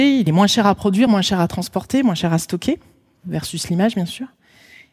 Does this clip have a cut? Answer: no; 0 cuts

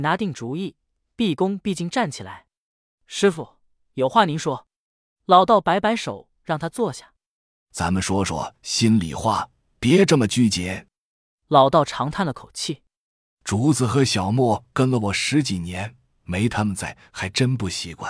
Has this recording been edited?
no; 0 cuts

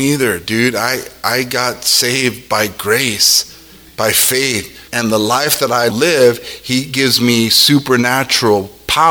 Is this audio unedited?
no; 2 cuts; at 4.9 s, 5.9 s

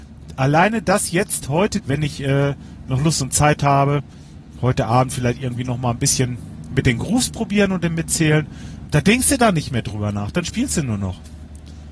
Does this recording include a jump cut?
yes; 2 cuts; at 1.8 s, 8.9 s

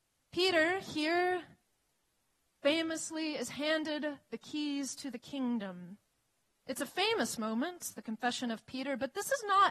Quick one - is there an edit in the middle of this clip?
yes; 1 cut; at 6.5 s

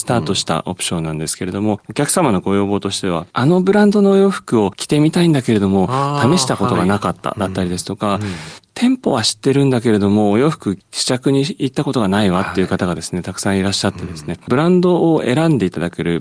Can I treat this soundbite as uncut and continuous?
yes; 0 cuts

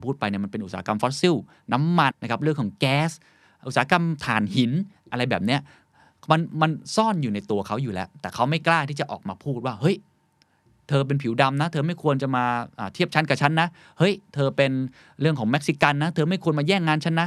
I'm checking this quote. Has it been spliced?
yes; 1 cut; at 2.1 s

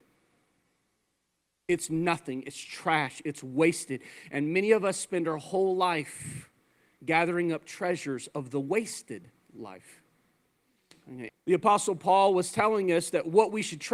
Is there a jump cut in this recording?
yes; 1 cut; at 11.3 s

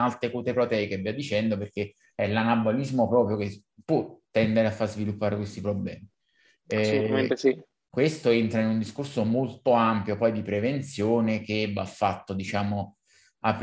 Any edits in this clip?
no; 0 cuts

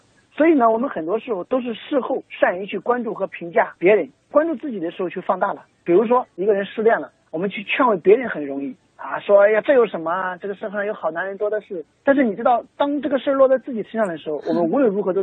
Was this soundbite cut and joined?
no; 0 cuts

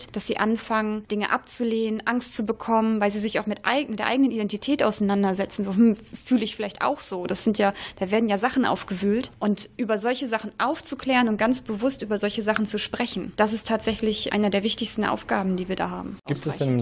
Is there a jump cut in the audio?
no; 0 cuts

